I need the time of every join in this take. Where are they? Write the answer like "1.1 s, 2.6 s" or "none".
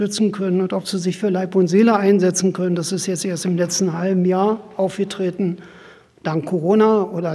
none